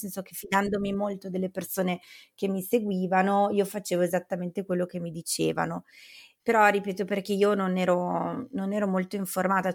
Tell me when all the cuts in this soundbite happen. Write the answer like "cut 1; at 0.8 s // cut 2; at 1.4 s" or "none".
cut 1; at 6.4 s